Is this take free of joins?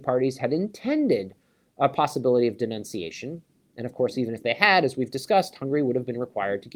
yes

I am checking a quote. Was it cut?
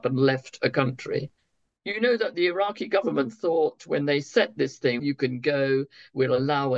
yes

